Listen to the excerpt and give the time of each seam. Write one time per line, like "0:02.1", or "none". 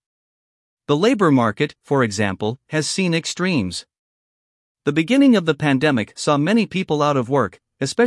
none